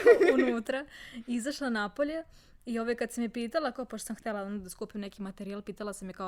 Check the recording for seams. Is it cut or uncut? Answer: uncut